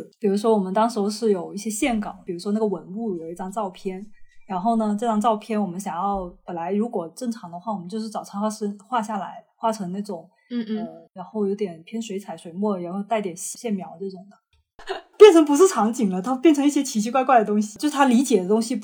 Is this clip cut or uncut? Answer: cut